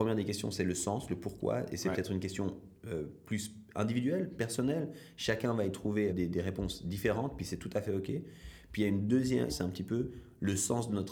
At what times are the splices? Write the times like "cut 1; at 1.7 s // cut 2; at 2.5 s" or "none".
cut 1; at 6.1 s // cut 2; at 9.5 s

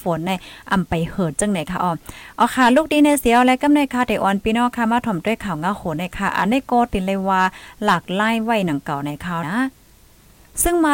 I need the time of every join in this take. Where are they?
cut 1; at 9.4 s

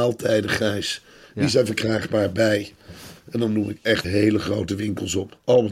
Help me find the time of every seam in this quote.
cut 1; at 4.0 s

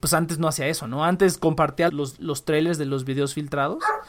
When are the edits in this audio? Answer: cut 1; at 1.9 s

